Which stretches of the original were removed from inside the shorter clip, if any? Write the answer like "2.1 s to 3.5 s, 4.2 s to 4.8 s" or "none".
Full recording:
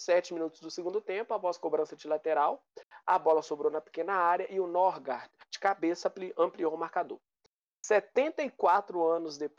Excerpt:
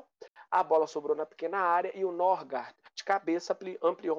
none